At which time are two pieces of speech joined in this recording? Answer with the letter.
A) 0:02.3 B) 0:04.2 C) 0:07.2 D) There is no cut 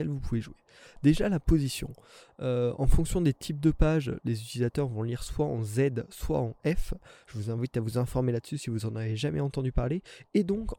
D